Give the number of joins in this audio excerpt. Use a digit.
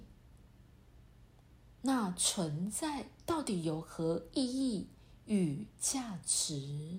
1